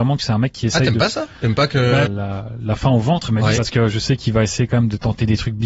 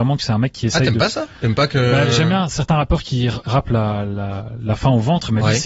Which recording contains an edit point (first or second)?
first